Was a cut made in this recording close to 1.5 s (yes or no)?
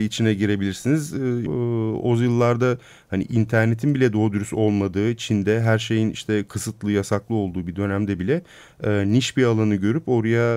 yes